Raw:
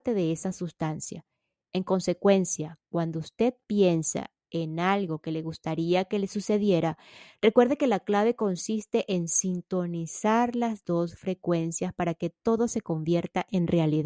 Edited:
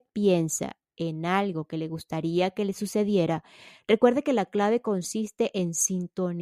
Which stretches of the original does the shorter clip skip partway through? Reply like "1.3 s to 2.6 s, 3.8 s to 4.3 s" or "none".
none